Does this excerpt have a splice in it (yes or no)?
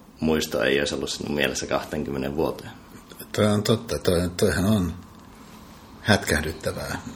no